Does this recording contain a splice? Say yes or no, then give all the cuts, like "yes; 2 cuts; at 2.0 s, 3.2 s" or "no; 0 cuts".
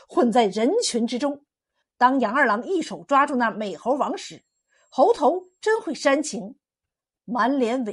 yes; 1 cut; at 1.8 s